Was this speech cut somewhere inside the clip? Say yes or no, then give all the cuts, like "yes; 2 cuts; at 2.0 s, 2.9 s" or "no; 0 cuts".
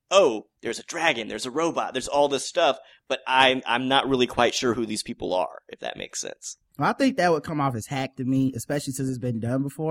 no; 0 cuts